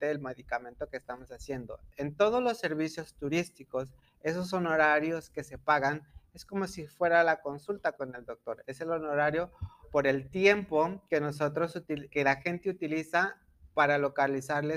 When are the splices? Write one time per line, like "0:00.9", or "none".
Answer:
0:09.8
0:12.1

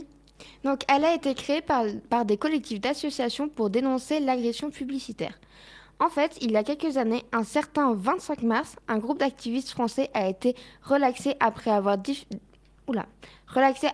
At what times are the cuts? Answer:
none

